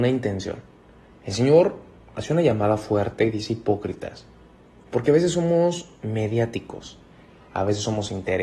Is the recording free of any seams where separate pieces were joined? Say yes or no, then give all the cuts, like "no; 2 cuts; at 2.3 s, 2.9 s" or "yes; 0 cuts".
no; 1 cut; at 1.1 s